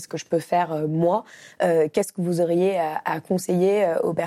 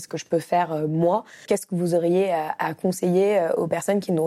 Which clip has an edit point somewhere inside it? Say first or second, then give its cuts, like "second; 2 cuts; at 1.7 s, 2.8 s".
second; 1 cut; at 1.5 s